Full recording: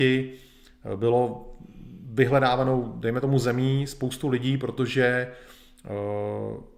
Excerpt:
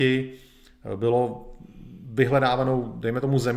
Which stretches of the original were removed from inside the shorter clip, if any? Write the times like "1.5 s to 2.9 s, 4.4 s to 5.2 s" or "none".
none